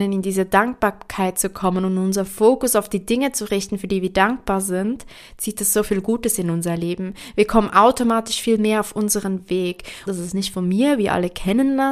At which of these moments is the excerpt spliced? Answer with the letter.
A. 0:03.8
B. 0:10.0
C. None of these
B